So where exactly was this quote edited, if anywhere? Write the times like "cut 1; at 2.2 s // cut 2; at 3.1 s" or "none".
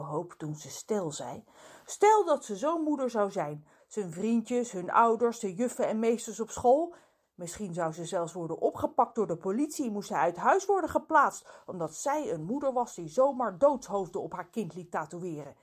cut 1; at 3.8 s // cut 2; at 7.2 s